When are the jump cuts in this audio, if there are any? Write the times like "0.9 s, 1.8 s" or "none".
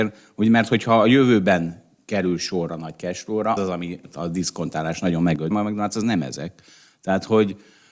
3.6 s, 5.5 s

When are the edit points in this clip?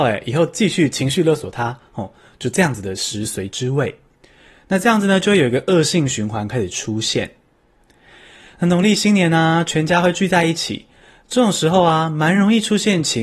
none

